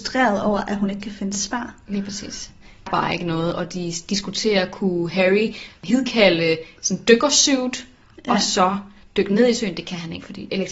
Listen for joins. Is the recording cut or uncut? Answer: cut